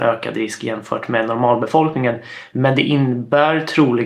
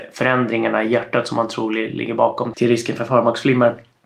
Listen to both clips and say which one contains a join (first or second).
second